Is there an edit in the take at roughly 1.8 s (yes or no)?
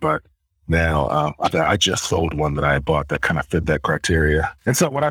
no